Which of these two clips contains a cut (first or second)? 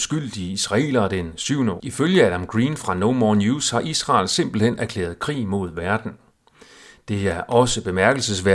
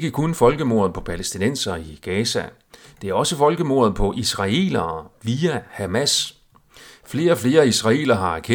first